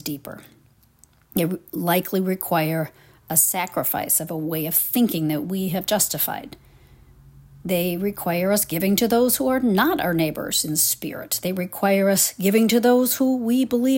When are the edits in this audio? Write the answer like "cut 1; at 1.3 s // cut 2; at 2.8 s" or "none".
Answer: none

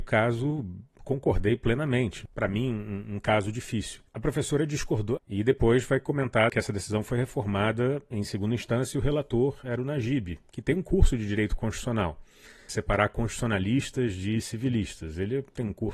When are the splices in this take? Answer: cut 1; at 2.3 s // cut 2; at 5.2 s // cut 3; at 12.7 s

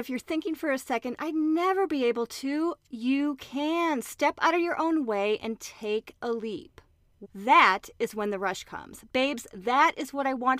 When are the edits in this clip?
cut 1; at 2.9 s // cut 2; at 7.2 s

